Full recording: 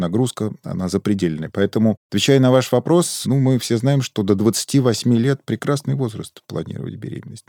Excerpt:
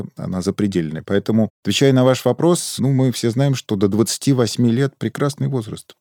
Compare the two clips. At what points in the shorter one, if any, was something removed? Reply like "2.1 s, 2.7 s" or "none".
none

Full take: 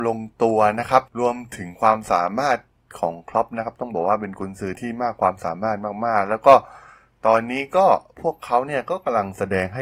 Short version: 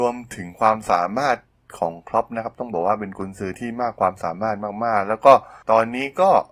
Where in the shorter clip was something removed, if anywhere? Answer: 5.6 s

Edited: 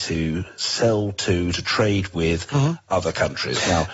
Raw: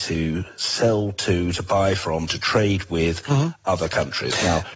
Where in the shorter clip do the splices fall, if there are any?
1.5 s

